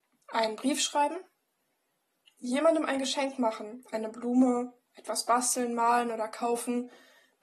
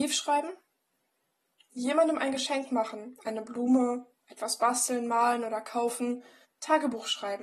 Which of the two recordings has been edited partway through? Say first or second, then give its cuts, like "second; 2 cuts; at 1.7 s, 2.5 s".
second; 1 cut; at 6.4 s